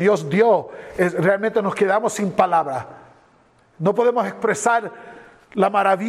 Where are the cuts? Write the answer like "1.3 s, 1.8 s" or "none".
none